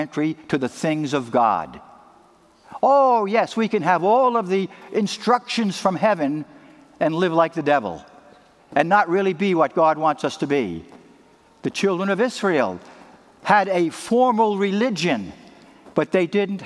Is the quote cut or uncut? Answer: uncut